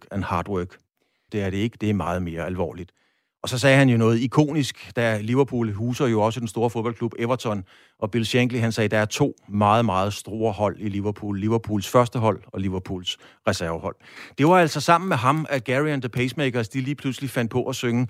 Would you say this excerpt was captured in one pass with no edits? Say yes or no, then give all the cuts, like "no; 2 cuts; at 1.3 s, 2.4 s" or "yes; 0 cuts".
no; 1 cut; at 1.3 s